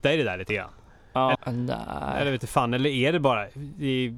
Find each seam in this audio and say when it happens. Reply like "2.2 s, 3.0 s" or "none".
1.3 s